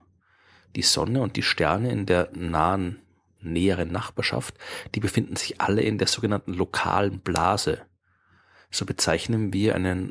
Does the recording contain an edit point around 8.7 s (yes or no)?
no